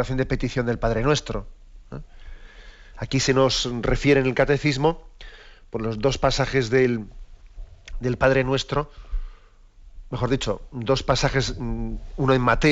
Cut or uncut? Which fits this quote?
uncut